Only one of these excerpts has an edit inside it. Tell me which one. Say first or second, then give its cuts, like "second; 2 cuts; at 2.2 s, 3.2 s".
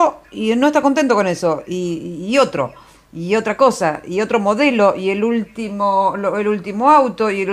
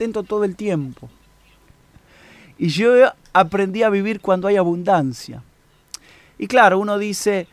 second; 1 cut; at 1.7 s